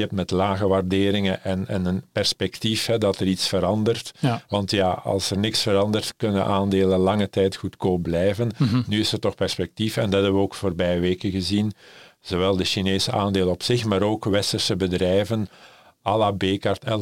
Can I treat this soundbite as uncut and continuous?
yes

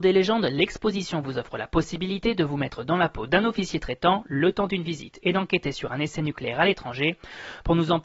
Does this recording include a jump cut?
no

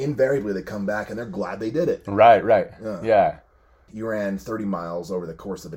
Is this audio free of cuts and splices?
no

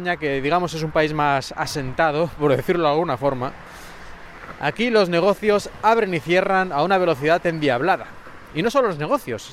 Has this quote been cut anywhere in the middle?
no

